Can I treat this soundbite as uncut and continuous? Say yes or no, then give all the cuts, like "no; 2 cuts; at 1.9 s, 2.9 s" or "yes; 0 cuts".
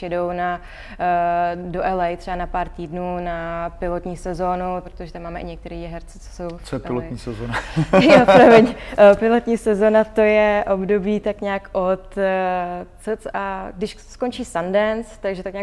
no; 1 cut; at 4.8 s